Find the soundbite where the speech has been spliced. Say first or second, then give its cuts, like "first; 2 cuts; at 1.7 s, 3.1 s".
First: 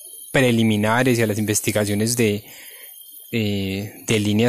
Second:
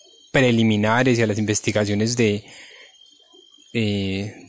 first; 1 cut; at 3.2 s